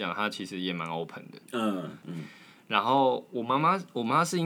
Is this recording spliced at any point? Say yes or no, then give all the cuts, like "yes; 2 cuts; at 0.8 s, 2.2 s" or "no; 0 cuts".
yes; 1 cut; at 2.0 s